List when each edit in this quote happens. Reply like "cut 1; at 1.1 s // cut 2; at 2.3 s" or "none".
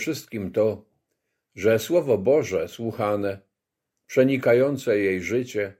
none